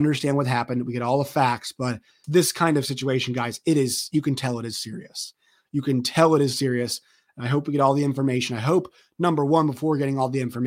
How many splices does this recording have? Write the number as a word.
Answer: one